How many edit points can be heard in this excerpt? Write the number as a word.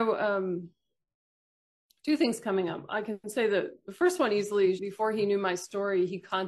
one